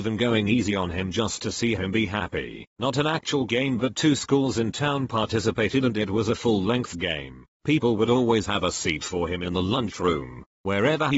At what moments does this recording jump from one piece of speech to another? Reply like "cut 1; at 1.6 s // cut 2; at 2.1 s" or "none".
cut 1; at 2.7 s // cut 2; at 7.5 s